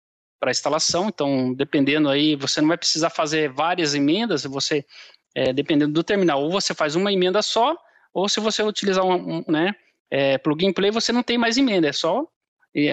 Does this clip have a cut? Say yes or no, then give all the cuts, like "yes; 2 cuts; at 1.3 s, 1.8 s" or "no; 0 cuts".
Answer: yes; 1 cut; at 9.5 s